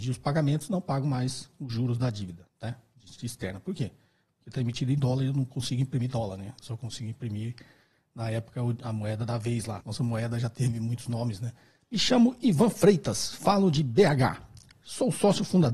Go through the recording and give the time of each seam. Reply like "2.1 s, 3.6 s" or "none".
9.8 s, 11.8 s